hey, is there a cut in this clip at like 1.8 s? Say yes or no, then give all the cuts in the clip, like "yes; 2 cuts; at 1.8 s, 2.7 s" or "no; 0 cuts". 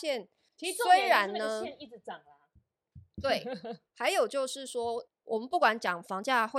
no; 2 cuts; at 3.9 s, 5.1 s